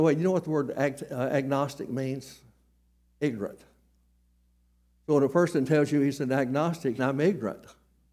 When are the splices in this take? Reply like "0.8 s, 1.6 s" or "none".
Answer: 7.0 s